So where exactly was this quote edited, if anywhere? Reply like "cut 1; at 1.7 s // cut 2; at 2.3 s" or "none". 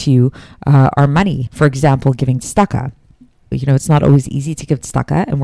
cut 1; at 1.5 s // cut 2; at 3.5 s